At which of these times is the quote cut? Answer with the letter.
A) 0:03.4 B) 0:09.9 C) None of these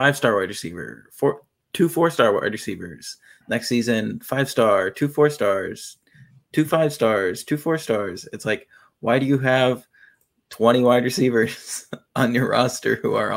C